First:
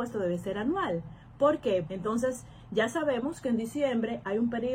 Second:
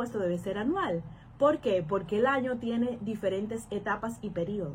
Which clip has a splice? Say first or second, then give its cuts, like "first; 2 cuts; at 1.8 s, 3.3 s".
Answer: first; 1 cut; at 1.8 s